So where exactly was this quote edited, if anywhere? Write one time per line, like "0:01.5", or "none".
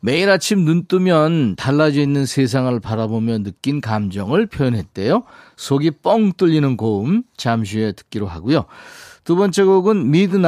none